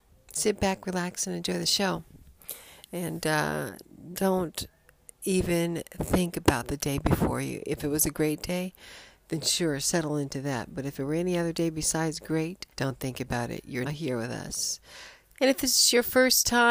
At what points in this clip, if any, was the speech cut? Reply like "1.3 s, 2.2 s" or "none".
12.7 s, 13.9 s, 15.4 s